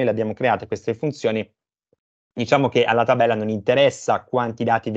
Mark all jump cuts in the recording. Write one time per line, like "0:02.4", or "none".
none